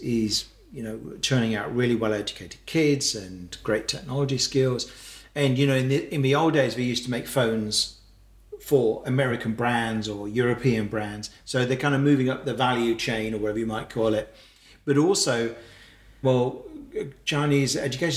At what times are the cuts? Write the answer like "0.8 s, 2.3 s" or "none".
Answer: 11.4 s, 16.2 s